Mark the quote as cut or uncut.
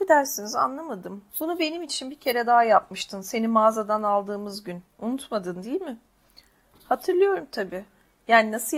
cut